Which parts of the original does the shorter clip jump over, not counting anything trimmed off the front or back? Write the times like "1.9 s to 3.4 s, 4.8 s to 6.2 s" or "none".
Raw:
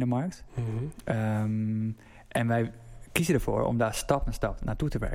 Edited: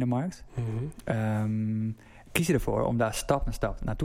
2.3 s to 3.1 s